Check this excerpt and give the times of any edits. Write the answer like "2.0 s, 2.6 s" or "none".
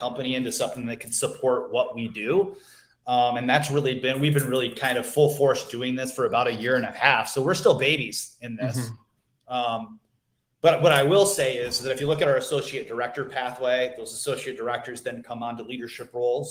none